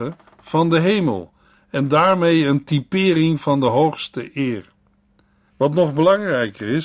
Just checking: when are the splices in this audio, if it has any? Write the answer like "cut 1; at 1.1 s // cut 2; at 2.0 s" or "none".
cut 1; at 5.5 s